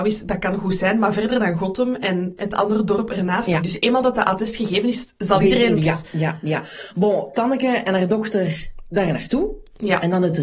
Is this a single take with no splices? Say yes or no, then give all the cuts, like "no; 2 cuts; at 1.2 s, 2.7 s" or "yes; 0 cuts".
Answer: no; 2 cuts; at 3.6 s, 5.8 s